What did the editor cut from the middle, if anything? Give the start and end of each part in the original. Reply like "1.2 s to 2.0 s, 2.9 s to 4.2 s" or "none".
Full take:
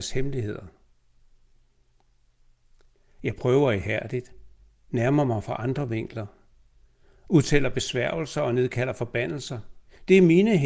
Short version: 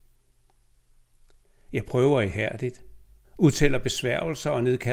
4.7 s to 7.2 s